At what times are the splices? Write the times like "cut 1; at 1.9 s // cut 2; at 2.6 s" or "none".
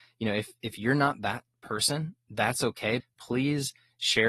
cut 1; at 3.0 s